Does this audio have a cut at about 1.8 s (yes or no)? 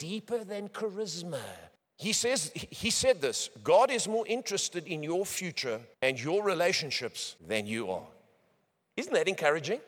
yes